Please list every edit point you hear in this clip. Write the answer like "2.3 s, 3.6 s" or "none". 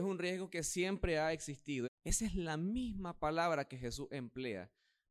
1.8 s